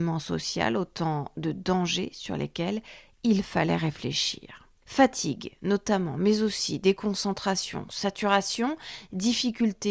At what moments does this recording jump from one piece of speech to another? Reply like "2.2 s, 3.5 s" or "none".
4.8 s